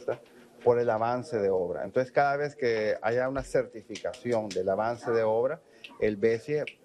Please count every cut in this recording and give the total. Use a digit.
0